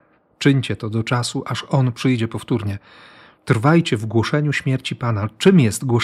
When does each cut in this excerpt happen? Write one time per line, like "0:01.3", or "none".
none